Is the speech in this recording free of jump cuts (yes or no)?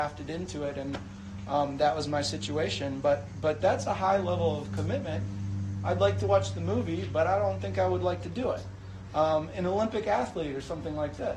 yes